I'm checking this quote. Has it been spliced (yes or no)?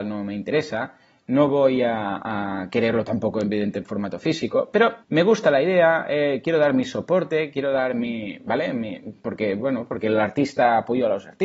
yes